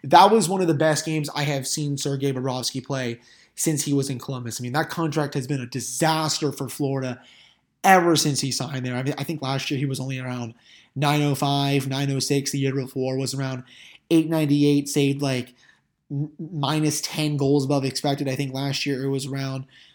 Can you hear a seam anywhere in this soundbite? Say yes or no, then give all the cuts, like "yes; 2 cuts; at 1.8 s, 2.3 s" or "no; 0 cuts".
no; 0 cuts